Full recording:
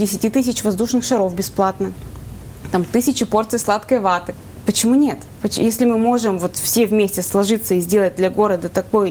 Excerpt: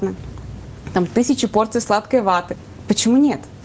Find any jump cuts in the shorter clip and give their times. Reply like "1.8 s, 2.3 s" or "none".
none